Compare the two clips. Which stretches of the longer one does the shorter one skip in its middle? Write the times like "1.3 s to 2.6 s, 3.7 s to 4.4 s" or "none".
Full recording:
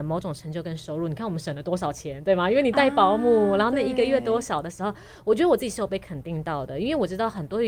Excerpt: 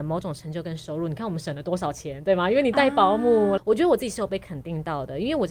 3.6 s to 5.2 s